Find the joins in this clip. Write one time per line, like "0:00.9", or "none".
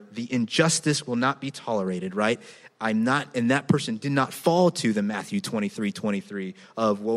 none